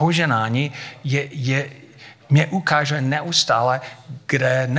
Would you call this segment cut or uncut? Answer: uncut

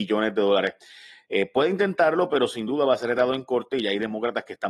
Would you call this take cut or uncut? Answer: uncut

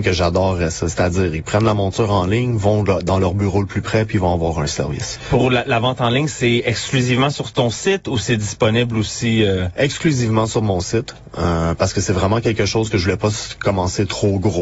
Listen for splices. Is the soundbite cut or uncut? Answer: uncut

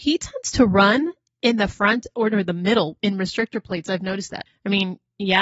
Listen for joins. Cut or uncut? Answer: cut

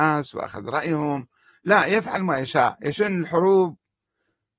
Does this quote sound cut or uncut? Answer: uncut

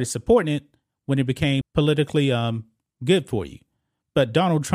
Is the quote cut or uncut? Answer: cut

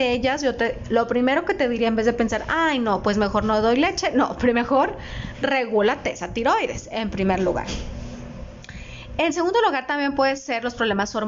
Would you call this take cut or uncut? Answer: uncut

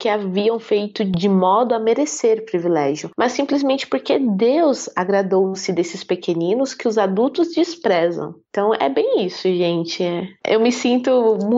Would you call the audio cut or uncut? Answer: uncut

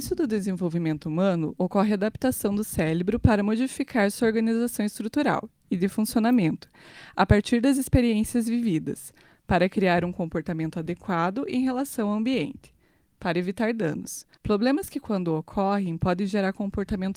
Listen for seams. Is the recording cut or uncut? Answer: cut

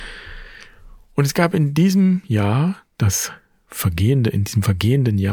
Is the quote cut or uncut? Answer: uncut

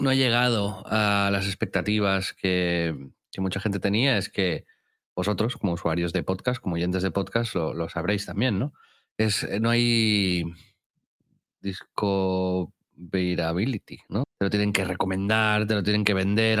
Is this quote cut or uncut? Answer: cut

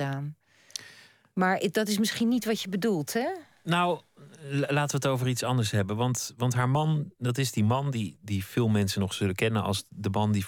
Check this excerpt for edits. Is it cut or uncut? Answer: cut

